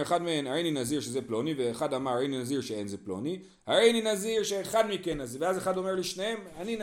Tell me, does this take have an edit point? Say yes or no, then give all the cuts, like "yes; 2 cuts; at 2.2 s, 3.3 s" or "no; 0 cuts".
no; 0 cuts